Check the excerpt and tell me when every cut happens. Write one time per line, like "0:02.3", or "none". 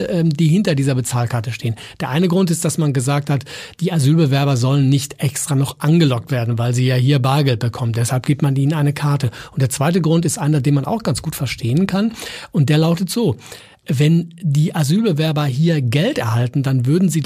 none